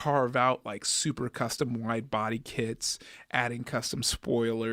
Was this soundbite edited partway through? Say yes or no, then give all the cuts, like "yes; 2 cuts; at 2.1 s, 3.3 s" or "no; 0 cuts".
no; 0 cuts